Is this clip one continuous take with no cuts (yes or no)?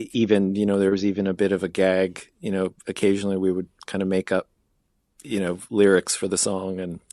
yes